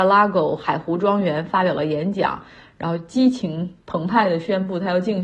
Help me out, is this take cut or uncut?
uncut